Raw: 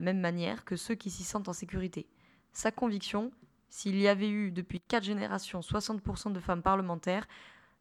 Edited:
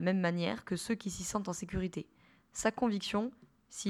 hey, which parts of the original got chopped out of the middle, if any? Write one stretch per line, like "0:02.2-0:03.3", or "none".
none